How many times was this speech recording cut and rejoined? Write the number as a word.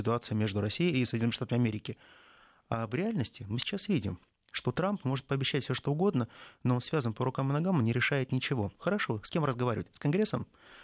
one